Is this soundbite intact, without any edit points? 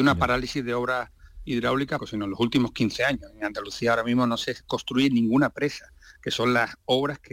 no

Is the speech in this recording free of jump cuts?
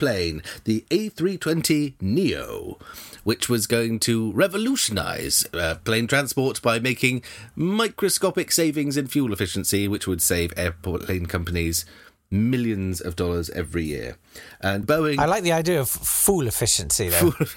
no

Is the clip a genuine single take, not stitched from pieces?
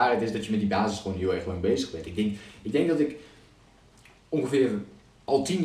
yes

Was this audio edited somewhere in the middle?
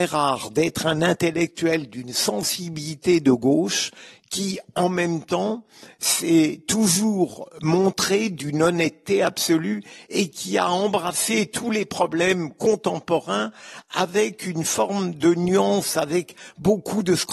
no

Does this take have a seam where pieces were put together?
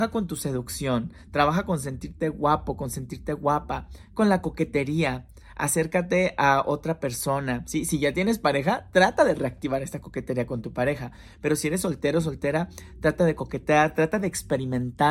no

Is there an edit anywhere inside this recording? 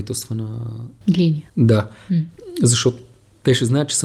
no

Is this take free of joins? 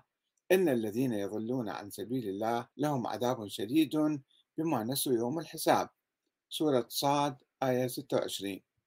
no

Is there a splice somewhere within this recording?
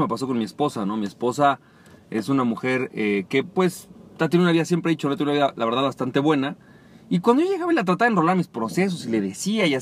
no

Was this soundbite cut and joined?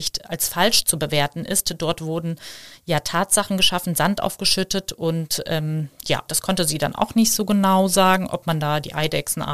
yes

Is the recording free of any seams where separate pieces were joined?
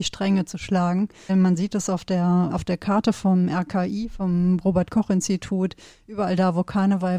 no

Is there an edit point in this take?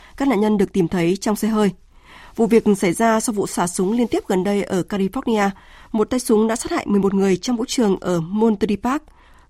no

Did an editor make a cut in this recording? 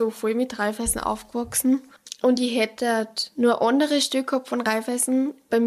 no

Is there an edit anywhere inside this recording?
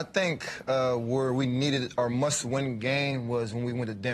no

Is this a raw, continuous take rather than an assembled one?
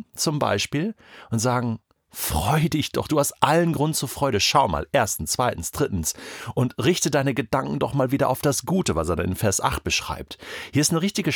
no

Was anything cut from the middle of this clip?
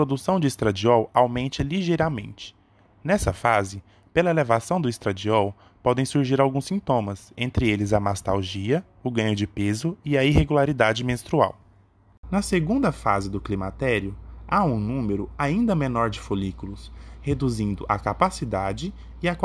no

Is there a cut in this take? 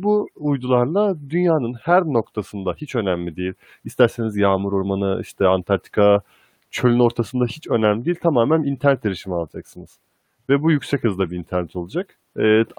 no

